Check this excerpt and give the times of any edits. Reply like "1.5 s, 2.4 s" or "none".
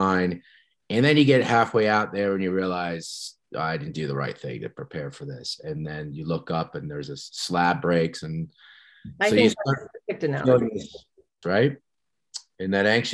11.4 s

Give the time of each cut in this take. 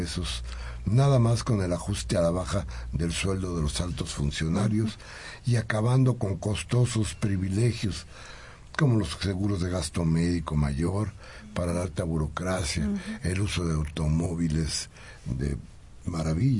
none

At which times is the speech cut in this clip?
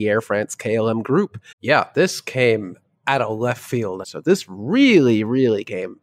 1.5 s, 4.0 s

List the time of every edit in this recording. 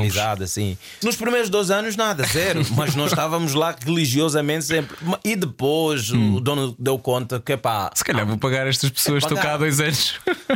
1.0 s

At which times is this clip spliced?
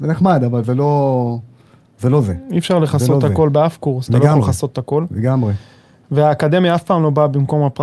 4.1 s

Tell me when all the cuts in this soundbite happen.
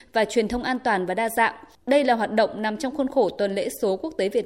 none

